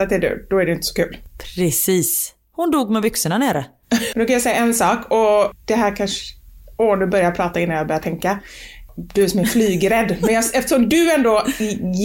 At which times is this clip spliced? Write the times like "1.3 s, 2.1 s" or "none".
4.1 s